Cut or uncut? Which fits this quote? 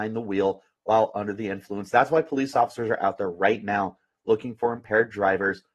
uncut